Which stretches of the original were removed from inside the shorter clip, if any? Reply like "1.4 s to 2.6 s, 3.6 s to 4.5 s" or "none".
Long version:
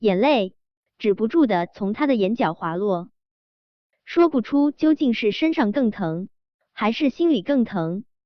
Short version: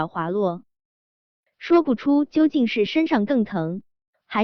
none